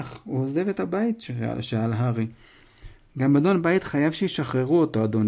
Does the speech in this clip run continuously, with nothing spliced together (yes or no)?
yes